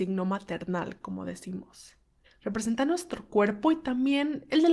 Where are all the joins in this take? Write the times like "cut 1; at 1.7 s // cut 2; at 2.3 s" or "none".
cut 1; at 2.2 s

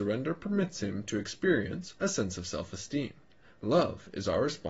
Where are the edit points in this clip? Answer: cut 1; at 2.0 s

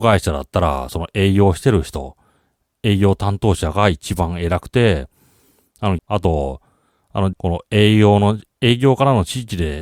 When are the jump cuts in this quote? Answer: cut 1; at 6.0 s // cut 2; at 7.3 s

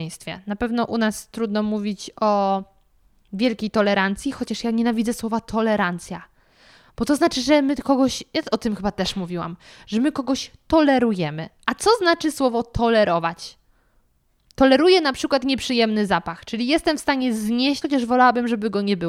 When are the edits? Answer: cut 1; at 17.8 s

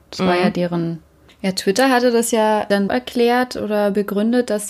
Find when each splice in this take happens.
cut 1; at 1.3 s // cut 2; at 2.9 s

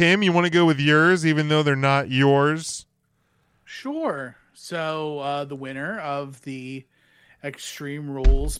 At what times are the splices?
none

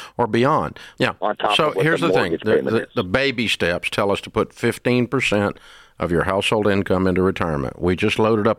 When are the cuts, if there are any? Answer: cut 1; at 1.0 s

